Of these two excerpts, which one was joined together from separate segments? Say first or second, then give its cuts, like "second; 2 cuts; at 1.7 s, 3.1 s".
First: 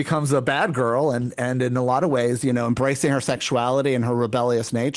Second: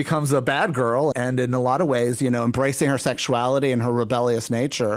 second; 1 cut; at 1.1 s